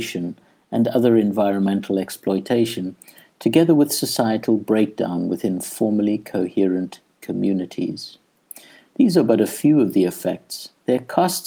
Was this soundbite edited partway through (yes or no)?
no